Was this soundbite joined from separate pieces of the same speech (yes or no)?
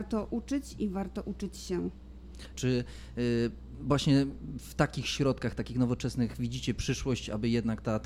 yes